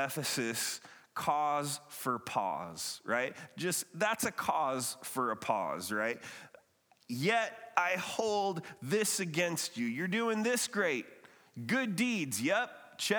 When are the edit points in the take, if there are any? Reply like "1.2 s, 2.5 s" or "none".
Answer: none

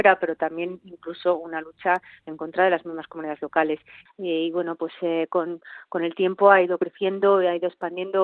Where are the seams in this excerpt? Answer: 4.1 s

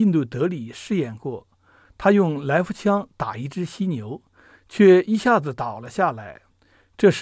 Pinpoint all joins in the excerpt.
none

